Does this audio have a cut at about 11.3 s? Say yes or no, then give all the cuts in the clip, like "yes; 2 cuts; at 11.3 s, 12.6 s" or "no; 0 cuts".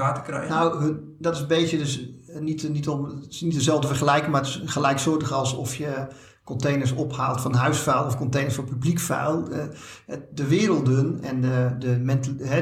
no; 0 cuts